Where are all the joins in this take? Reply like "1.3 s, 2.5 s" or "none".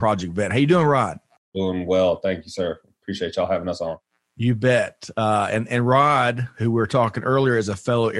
none